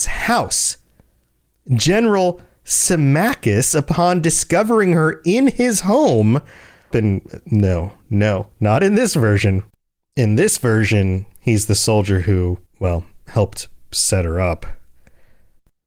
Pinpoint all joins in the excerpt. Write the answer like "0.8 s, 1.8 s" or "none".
6.9 s, 12.7 s